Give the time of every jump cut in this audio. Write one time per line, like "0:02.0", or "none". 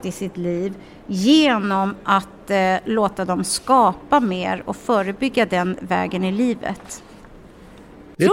none

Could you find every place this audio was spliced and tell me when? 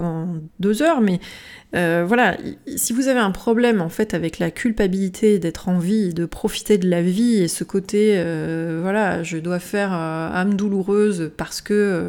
none

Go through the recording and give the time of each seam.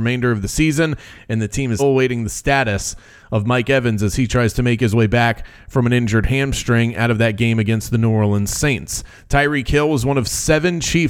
0:01.8

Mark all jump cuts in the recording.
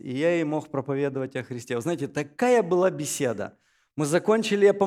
none

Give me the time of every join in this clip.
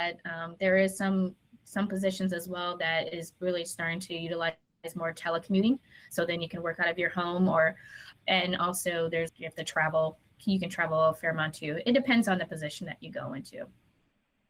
0:08.1
0:09.3

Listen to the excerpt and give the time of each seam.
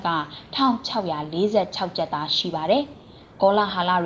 none

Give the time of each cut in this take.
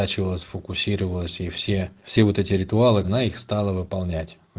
0:02.0
0:03.0

